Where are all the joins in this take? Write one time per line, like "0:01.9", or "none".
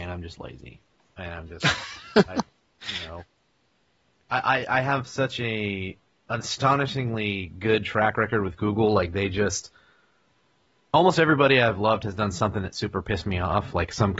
none